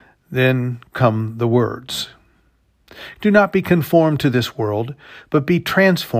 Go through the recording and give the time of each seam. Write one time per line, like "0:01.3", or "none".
0:03.2